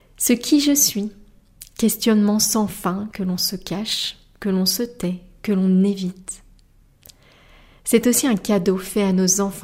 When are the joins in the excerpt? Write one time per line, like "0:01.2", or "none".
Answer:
none